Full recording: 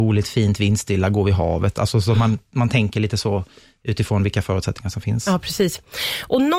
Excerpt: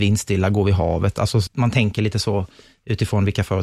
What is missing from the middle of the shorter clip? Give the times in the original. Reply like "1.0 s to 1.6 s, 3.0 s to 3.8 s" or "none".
2.1 s to 2.4 s